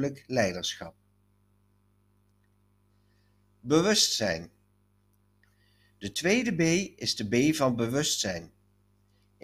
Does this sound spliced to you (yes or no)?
no